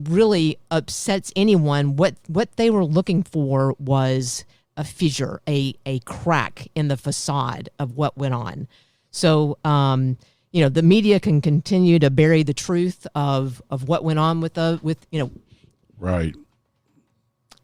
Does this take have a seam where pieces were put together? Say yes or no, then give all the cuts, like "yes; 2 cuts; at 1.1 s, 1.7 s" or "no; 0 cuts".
no; 0 cuts